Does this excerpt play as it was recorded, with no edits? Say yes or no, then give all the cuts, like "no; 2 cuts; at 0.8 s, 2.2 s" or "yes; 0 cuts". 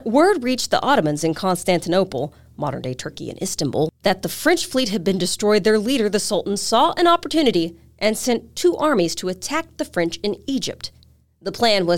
yes; 0 cuts